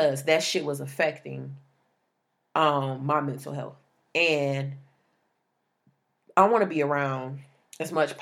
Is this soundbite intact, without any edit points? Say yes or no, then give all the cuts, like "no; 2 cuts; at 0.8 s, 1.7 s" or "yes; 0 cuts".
yes; 0 cuts